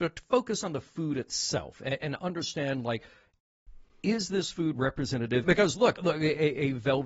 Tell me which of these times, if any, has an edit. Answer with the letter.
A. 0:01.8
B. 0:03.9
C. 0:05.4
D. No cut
C